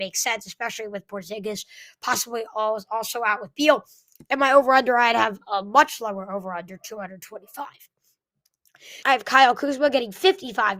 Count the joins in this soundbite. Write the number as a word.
one